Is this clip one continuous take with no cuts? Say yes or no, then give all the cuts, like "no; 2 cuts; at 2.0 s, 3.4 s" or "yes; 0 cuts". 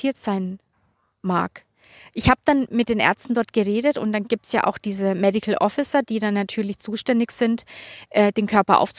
yes; 0 cuts